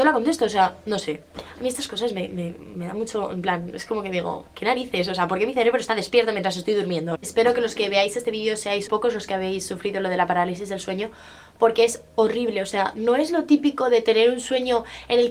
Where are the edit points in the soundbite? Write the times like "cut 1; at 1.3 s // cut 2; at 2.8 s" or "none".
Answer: cut 1; at 7.2 s // cut 2; at 8.9 s